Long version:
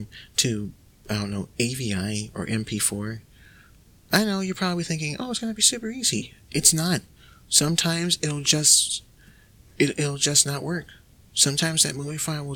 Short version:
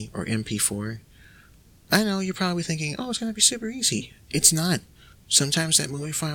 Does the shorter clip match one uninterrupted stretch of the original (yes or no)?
no